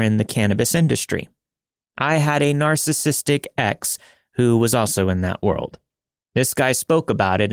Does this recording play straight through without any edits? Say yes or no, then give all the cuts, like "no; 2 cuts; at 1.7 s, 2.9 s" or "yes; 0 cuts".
yes; 0 cuts